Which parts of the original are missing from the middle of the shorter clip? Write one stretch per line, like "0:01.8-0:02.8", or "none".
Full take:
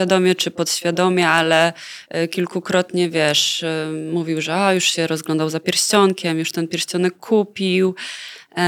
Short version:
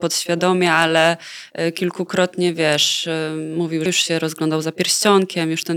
0:04.4-0:04.7